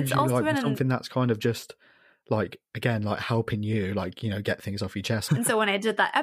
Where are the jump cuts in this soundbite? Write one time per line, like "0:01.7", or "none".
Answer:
0:05.3